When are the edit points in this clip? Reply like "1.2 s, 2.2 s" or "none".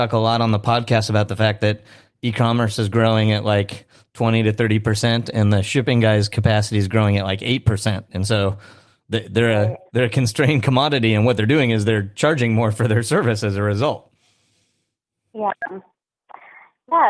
none